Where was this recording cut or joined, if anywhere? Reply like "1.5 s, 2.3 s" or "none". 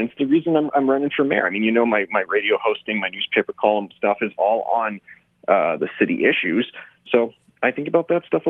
5.8 s, 7.1 s